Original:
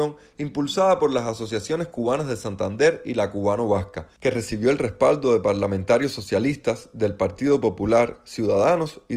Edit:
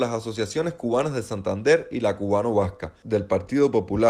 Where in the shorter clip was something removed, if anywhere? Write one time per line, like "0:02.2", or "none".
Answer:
0:03.0